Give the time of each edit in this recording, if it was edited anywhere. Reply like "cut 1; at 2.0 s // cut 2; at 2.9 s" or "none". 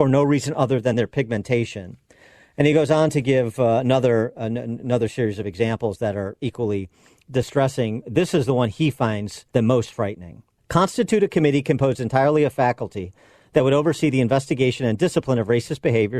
none